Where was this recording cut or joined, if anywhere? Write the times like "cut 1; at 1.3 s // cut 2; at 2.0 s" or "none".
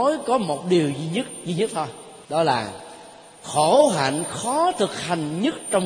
cut 1; at 2.2 s